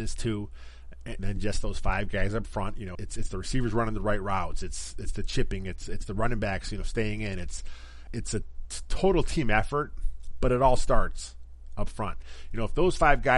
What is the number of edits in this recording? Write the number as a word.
three